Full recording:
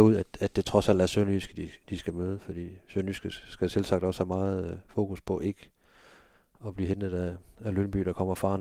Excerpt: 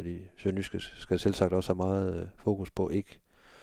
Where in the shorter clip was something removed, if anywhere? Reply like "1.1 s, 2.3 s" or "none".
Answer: none